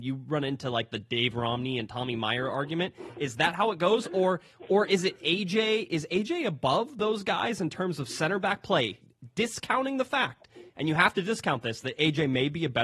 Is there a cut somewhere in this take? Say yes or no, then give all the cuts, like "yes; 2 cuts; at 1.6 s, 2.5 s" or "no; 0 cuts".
no; 0 cuts